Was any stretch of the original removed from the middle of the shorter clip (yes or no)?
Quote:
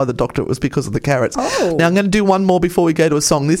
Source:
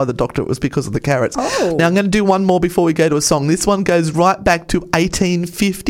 no